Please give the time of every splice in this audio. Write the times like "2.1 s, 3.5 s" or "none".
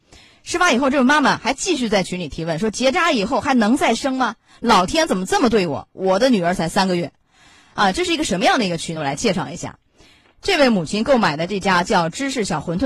none